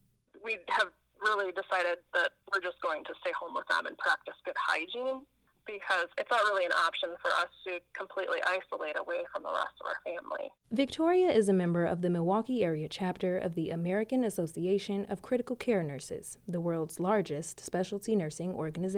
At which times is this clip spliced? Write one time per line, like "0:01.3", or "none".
0:10.6